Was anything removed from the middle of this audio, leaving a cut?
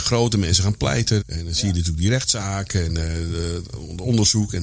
yes; 1 cut; at 1.2 s

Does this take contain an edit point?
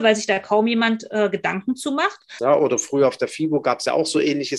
yes; 1 cut; at 2.4 s

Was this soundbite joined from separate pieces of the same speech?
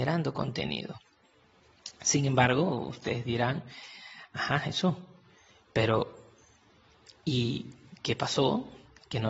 no; 0 cuts

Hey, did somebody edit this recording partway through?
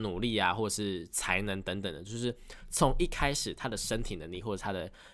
no; 0 cuts

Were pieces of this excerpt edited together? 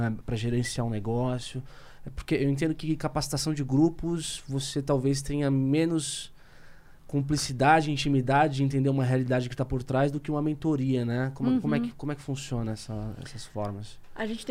no; 0 cuts

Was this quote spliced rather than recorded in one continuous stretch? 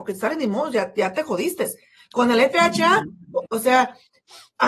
yes; 1 cut; at 3.5 s

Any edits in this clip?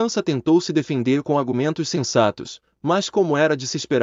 no; 0 cuts

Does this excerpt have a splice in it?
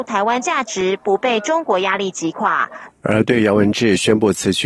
yes; 1 cut; at 2.9 s

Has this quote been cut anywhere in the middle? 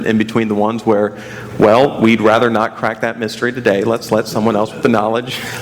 no; 0 cuts

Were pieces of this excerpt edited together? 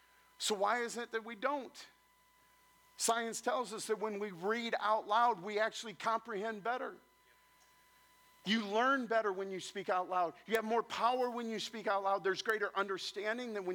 no; 0 cuts

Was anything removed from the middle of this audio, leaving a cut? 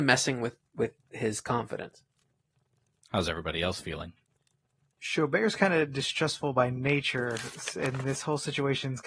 no; 0 cuts

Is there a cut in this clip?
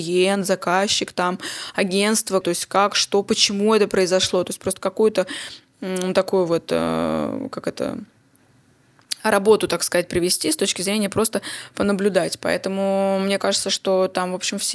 yes; 1 cut; at 2.4 s

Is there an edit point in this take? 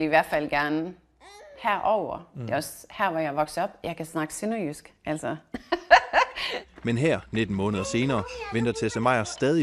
no; 0 cuts

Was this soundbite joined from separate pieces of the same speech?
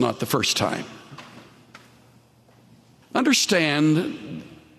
yes; 1 cut; at 3.0 s

